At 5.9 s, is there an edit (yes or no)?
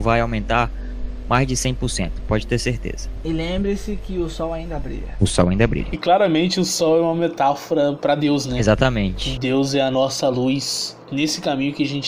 no